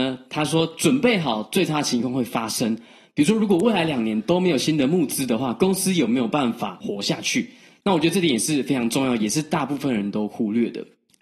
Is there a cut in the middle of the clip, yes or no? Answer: no